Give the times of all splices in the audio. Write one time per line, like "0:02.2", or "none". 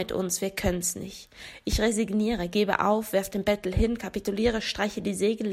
none